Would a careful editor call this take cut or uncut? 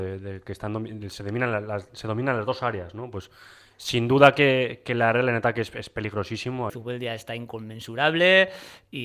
cut